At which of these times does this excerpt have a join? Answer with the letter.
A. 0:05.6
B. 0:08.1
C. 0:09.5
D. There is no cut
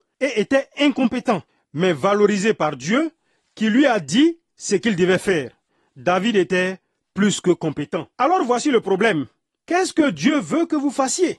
B